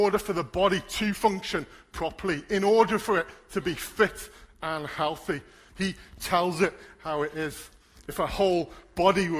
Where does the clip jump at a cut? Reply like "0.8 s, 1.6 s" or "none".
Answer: 5.7 s